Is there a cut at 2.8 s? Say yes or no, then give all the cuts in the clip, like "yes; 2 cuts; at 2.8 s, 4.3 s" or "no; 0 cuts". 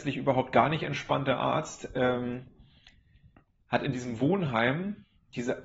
no; 0 cuts